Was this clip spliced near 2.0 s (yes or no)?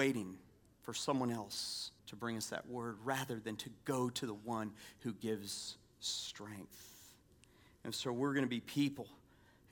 yes